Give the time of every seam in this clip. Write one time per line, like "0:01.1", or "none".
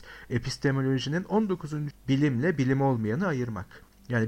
0:01.9